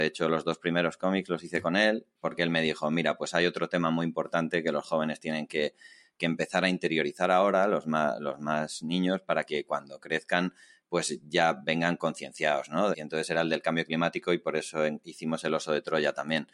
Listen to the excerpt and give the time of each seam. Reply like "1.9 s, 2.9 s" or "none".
12.9 s